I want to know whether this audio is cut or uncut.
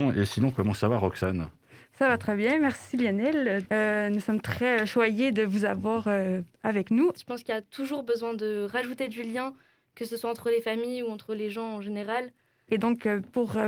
cut